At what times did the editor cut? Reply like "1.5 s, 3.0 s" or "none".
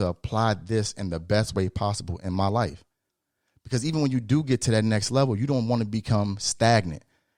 none